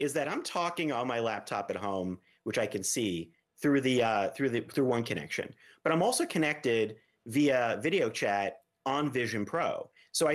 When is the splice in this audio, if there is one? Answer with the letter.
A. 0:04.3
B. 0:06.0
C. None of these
C